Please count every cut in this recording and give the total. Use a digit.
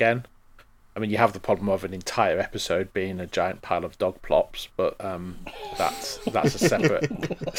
0